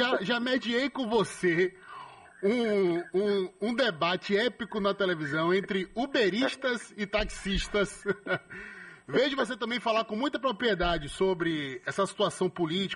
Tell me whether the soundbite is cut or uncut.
uncut